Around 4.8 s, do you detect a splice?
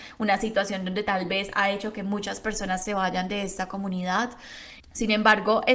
yes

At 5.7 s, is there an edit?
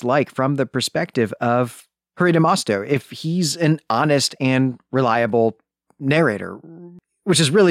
no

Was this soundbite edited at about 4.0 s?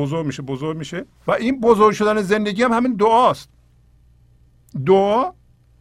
no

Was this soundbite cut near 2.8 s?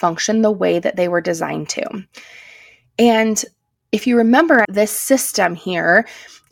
no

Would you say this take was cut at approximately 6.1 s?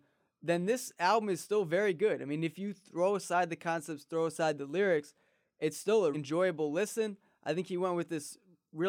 yes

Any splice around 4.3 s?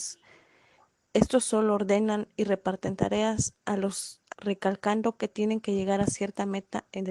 yes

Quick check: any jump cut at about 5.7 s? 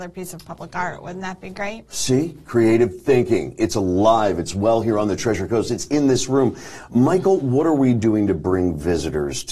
no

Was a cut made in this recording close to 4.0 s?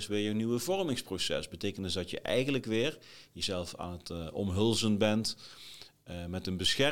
no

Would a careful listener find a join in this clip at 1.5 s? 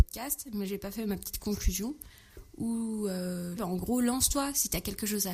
no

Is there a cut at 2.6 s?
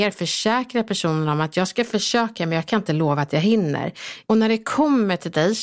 no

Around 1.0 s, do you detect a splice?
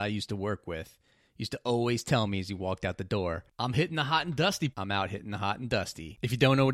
no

